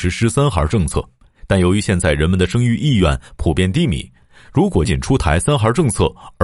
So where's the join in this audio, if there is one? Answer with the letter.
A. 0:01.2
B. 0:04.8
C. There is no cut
B